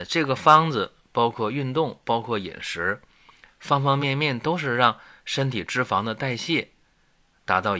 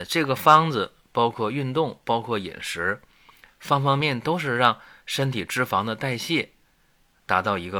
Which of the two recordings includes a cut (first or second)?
second